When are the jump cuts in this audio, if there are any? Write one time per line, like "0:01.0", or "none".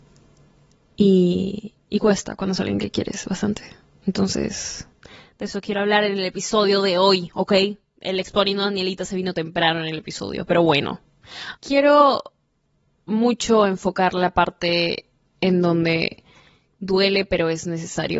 0:11.6